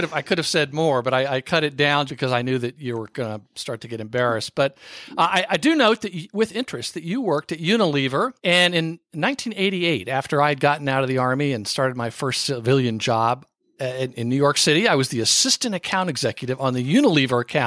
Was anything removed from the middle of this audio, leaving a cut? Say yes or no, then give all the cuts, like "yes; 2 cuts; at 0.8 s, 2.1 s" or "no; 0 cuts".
yes; 2 cuts; at 2.1 s, 8.4 s